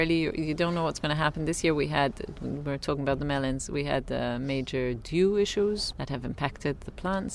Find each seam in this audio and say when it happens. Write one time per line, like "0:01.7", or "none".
0:05.9